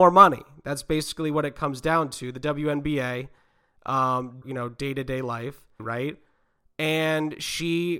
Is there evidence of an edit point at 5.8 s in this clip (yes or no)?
yes